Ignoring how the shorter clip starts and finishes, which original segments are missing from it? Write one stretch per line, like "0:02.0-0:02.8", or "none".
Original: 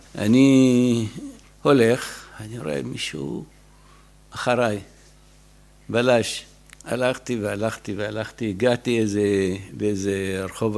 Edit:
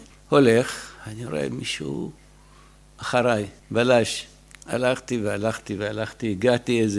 0:04.9-0:05.8